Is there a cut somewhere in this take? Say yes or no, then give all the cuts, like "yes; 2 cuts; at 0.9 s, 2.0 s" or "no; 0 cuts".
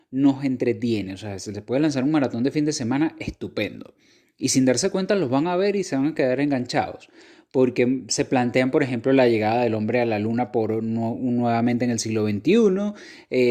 no; 0 cuts